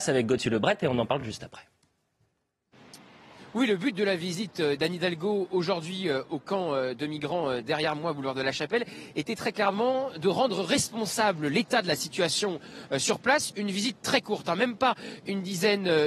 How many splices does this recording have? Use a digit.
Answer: 0